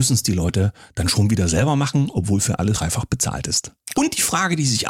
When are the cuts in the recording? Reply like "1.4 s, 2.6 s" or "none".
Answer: 2.7 s, 3.9 s